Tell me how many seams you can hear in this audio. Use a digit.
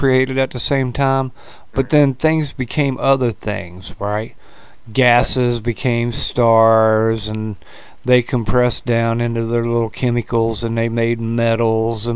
0